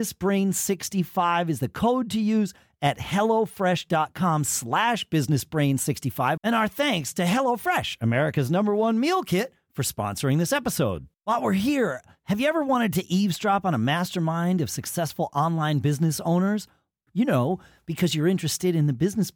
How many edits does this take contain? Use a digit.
3